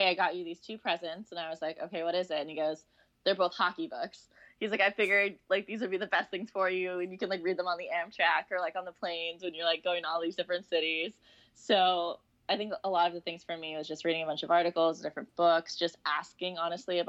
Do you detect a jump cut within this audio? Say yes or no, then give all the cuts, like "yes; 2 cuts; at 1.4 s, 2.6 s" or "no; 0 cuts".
no; 0 cuts